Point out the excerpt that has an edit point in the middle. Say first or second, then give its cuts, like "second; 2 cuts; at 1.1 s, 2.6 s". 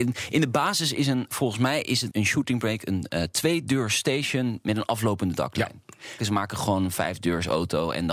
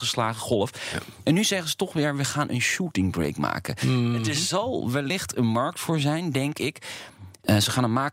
first; 2 cuts; at 2.1 s, 6.2 s